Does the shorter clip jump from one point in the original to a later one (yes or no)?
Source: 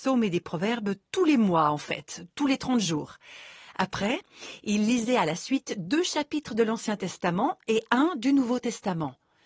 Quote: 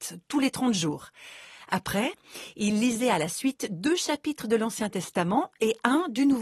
no